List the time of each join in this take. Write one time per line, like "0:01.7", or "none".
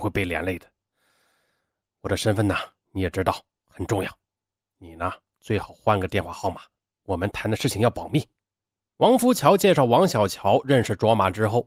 0:08.8

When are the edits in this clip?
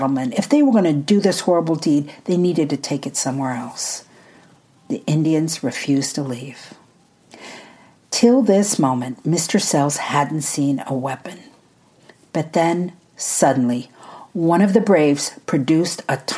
none

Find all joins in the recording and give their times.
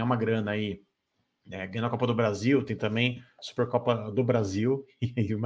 none

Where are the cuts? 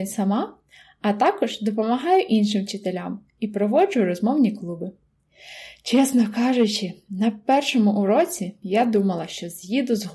none

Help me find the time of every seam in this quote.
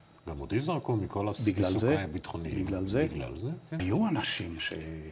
0:03.8

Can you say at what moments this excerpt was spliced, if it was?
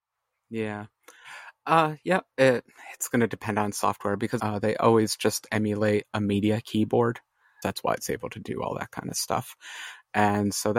0:04.4
0:07.6

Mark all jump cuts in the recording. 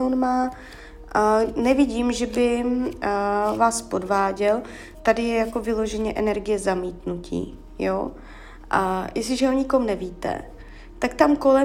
0:04.9

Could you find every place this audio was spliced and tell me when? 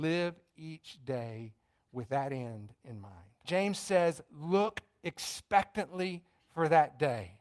0:03.4

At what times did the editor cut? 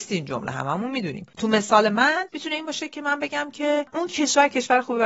none

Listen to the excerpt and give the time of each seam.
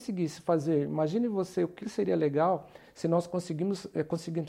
0:01.8

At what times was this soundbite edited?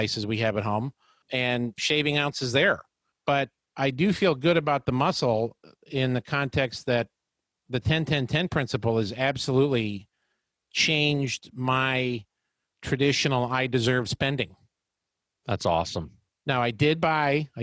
none

